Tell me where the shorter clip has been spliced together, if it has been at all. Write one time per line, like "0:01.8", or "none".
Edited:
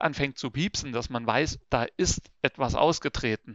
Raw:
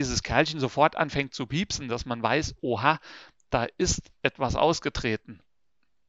0:01.6